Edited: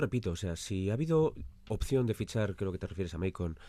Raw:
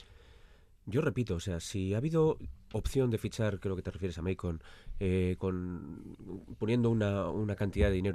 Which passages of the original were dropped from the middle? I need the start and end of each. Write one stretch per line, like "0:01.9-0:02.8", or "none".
none